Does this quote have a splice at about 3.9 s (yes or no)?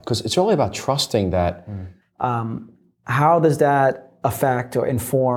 no